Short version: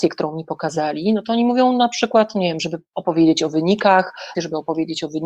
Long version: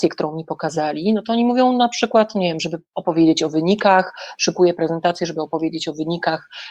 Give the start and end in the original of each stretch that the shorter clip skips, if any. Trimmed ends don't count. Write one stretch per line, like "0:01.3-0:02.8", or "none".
0:04.3-0:05.2